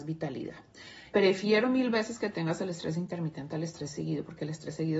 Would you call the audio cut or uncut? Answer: cut